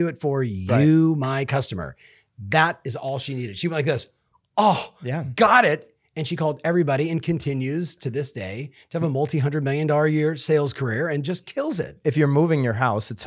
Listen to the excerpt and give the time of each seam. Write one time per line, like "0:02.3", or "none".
none